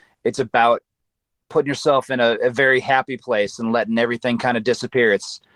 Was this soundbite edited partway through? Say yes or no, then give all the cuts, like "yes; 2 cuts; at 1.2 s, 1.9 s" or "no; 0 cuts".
no; 0 cuts